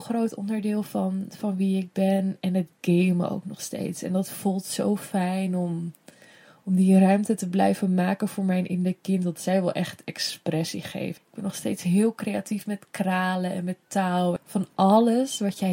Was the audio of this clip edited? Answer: yes; 2 cuts; at 11.2 s, 14.4 s

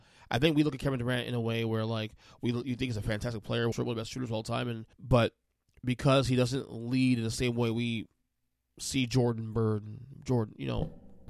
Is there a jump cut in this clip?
yes; 2 cuts; at 3.7 s, 4.9 s

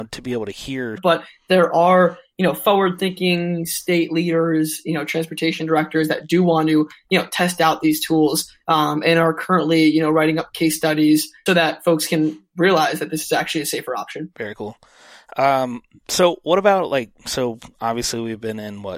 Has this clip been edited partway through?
yes; 2 cuts; at 1.0 s, 11.5 s

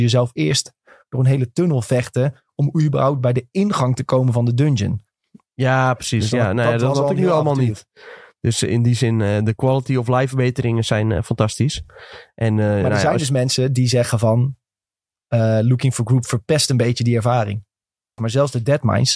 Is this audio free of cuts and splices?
no; 1 cut; at 18.2 s

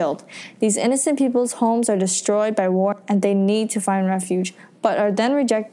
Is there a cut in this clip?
no; 0 cuts

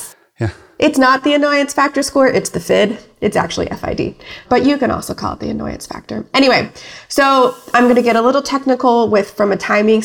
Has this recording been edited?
no; 0 cuts

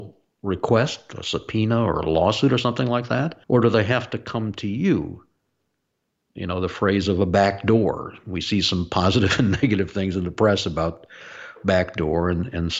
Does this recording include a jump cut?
yes; 2 cuts; at 3.4 s, 6.3 s

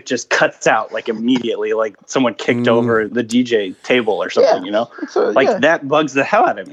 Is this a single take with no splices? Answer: no; 1 cut; at 3.1 s

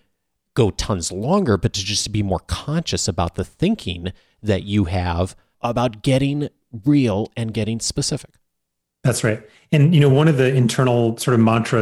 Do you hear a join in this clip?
no; 0 cuts

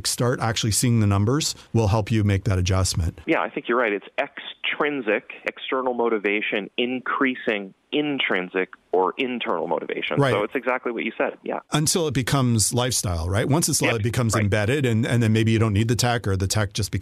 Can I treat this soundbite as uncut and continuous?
no; 1 cut; at 13.9 s

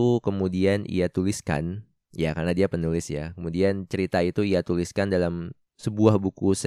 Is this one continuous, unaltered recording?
yes; 0 cuts

